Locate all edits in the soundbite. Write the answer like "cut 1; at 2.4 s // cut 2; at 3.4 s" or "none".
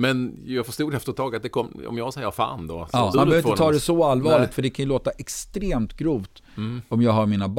cut 1; at 3.1 s